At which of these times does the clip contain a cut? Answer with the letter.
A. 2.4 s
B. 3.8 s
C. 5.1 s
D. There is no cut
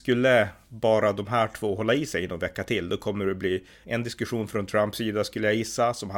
B